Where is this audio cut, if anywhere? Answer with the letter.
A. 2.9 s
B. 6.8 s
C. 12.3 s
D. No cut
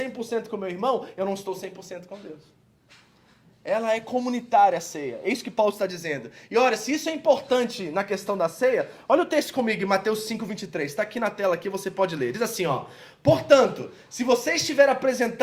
D